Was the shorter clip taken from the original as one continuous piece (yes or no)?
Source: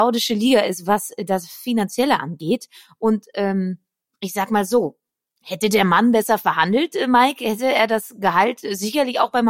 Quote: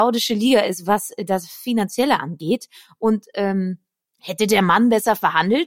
no